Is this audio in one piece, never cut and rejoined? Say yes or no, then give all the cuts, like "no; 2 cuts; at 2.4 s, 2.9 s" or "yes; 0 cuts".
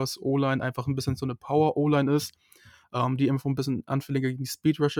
yes; 0 cuts